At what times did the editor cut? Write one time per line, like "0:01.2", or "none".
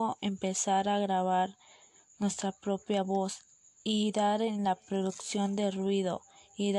none